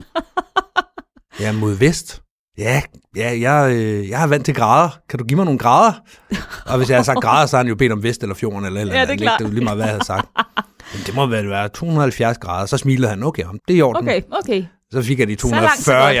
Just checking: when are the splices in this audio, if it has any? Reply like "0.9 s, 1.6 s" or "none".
13.6 s